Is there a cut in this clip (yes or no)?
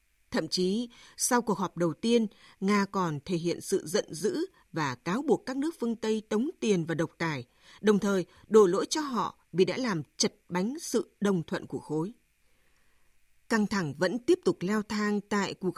no